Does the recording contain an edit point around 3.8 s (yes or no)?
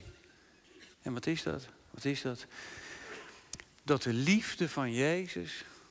no